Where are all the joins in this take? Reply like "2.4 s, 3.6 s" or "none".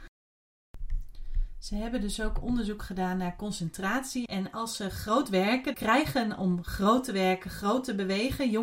4.3 s, 5.7 s